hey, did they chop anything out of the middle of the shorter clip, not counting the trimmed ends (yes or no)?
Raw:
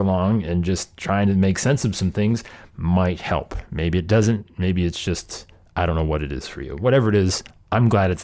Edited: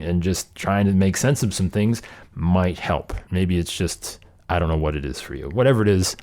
yes